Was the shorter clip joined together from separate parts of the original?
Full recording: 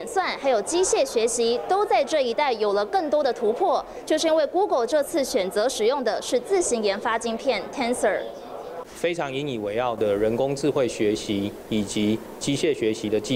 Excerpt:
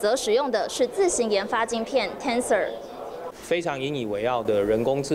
no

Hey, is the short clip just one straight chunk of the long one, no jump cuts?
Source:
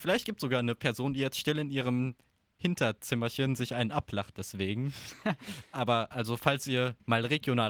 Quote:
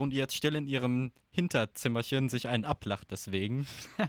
no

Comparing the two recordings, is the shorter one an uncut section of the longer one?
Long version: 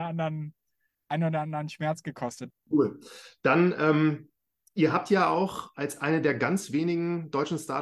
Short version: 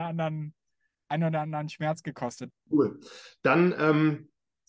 yes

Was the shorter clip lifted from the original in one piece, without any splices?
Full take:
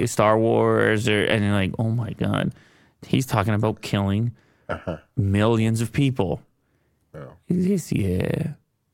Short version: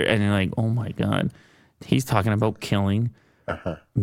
yes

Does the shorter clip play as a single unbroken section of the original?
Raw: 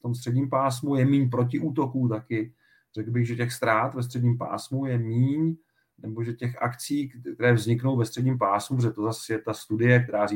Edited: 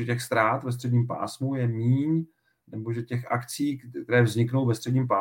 yes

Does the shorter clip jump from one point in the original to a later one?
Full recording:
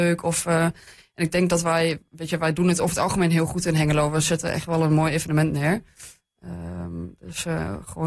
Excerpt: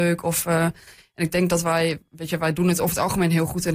no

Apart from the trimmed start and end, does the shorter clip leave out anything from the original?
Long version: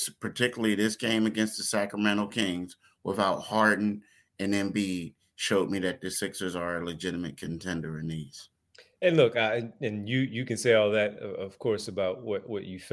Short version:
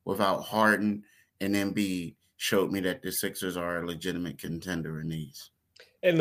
no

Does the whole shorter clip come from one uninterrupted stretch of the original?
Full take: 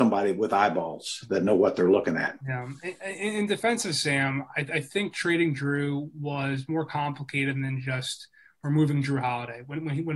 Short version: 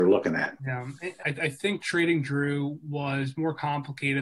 no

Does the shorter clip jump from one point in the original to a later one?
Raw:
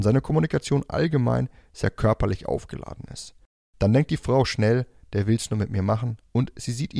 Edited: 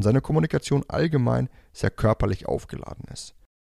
no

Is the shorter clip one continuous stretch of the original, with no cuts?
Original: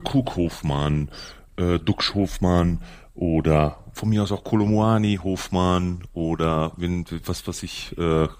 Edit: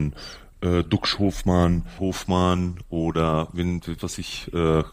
no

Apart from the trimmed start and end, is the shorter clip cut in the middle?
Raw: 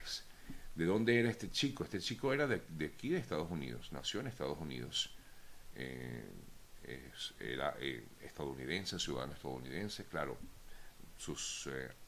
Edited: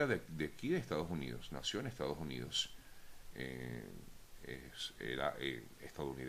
no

